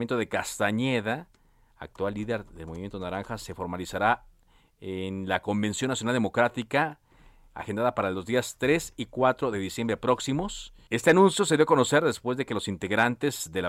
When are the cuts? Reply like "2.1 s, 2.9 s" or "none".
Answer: 10.9 s